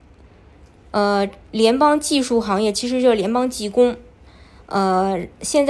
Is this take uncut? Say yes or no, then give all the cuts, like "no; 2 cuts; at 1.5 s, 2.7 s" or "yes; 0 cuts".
yes; 0 cuts